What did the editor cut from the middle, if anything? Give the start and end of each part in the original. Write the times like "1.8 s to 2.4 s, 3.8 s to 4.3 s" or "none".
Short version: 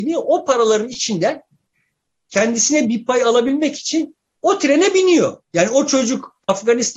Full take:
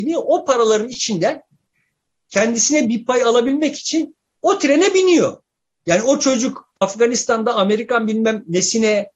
5.4 s to 5.8 s